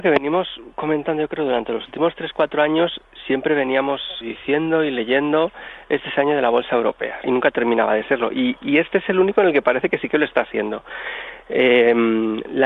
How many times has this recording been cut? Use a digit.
2